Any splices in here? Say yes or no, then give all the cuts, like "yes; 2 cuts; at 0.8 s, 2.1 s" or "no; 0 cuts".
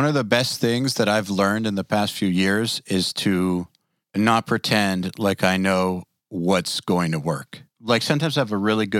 no; 0 cuts